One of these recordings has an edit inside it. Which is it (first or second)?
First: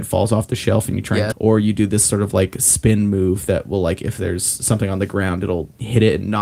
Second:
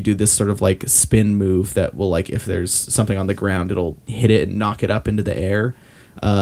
first